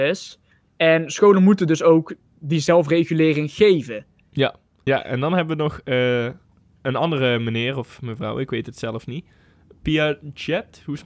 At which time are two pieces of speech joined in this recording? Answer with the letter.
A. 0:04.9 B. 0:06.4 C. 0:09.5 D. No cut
A